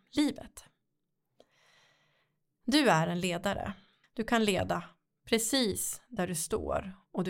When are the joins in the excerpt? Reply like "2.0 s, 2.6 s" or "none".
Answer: 4.0 s